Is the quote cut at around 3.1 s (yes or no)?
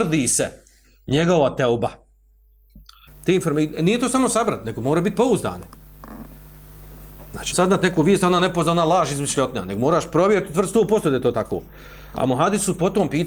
yes